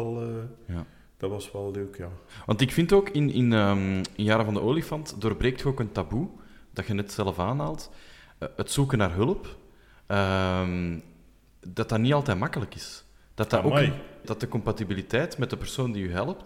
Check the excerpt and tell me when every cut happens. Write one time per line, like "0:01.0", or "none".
0:14.2